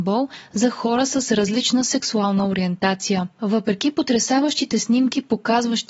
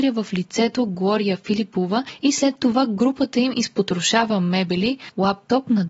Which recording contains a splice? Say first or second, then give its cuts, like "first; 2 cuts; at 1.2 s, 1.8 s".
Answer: first; 1 cut; at 3.4 s